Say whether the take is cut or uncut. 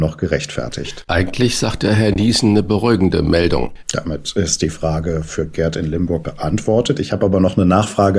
cut